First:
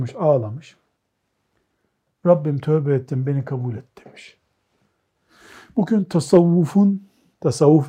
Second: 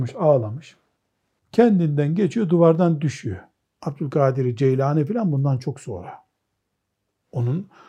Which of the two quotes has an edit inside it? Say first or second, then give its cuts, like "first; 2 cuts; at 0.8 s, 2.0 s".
second; 2 cuts; at 1.4 s, 3.7 s